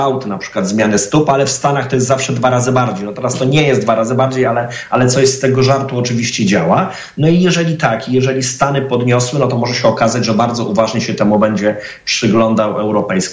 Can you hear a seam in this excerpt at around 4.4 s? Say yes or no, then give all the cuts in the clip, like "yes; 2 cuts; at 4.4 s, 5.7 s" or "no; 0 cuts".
no; 0 cuts